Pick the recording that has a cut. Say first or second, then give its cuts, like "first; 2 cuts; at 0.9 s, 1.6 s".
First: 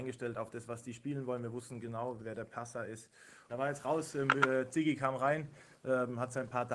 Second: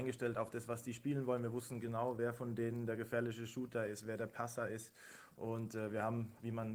first; 2 cuts; at 2.2 s, 3.5 s